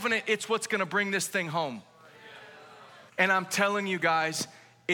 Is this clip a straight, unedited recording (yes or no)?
no